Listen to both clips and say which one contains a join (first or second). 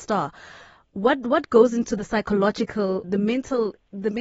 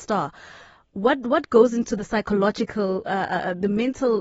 first